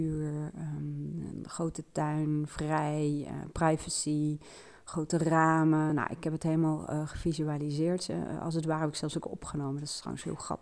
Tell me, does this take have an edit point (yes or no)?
no